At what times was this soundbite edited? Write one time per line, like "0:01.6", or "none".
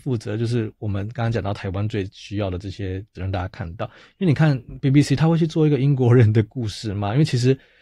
0:03.1

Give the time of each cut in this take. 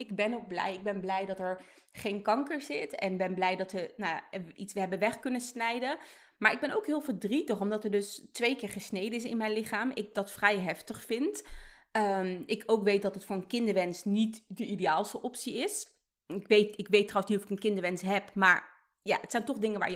none

